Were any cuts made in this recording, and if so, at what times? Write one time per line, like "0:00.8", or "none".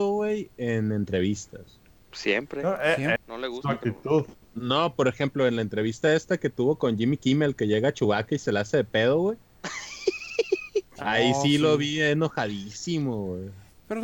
0:03.2

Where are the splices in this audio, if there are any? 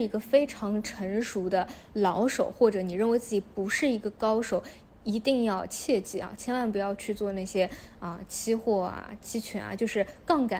none

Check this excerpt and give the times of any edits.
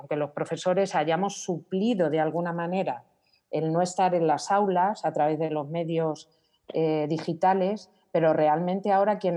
none

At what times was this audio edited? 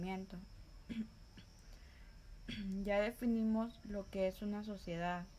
none

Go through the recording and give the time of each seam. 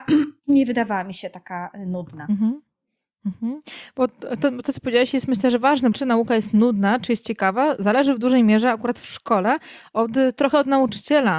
0:05.9

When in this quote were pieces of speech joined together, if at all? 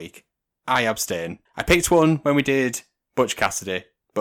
0:01.5

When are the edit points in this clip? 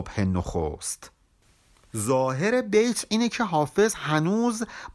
none

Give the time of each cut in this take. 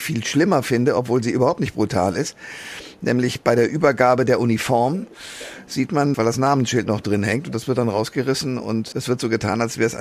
0:06.1
0:08.9

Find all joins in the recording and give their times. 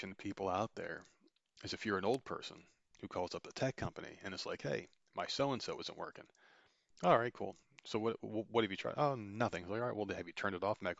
none

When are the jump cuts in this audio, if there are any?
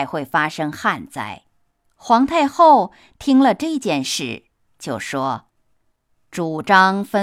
0:01.9
0:05.5

